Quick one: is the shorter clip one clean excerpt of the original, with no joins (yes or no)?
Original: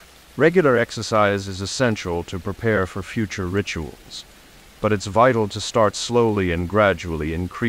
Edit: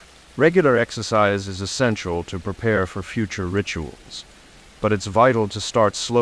yes